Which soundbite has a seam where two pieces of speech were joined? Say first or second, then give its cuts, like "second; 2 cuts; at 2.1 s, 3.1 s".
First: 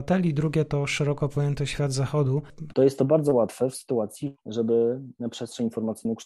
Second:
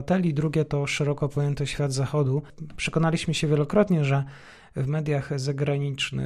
first; 2 cuts; at 2.7 s, 4.3 s